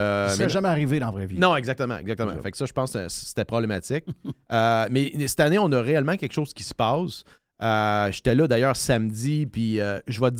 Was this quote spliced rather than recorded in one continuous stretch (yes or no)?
no